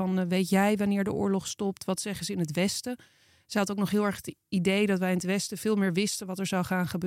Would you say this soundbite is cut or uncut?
uncut